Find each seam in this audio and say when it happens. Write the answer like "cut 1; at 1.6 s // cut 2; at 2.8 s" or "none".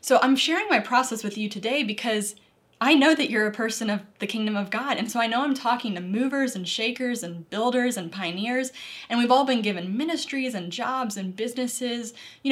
none